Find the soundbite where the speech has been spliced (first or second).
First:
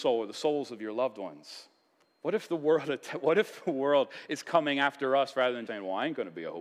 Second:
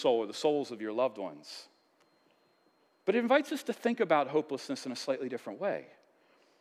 first